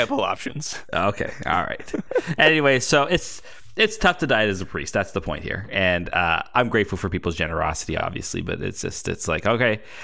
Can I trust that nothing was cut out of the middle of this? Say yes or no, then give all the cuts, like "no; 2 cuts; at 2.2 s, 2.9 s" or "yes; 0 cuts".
yes; 0 cuts